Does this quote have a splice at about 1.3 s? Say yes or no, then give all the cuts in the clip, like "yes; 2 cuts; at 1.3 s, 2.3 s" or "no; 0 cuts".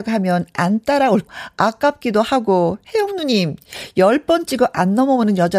yes; 1 cut; at 1.3 s